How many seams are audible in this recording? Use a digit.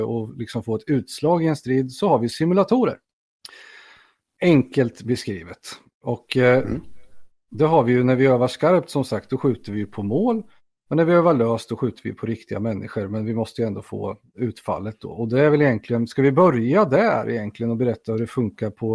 0